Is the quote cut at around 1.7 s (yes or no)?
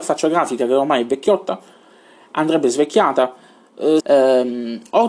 no